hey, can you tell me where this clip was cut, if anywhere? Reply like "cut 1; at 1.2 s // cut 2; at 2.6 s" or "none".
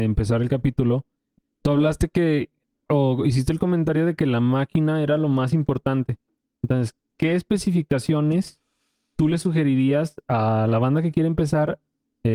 none